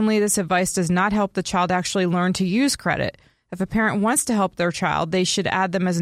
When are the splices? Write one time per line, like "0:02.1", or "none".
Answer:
none